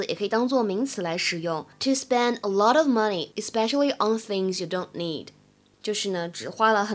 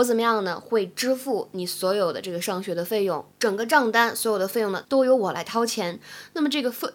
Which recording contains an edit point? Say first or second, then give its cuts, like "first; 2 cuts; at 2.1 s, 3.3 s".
second; 2 cuts; at 3.3 s, 4.8 s